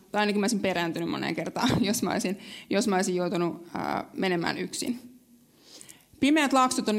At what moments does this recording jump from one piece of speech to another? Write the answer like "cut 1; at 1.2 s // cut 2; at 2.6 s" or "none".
none